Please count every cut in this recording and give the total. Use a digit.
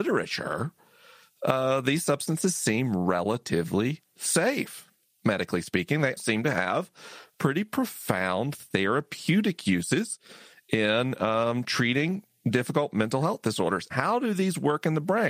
2